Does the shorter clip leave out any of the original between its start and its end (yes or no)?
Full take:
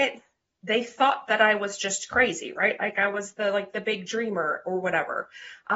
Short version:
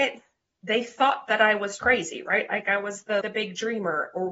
yes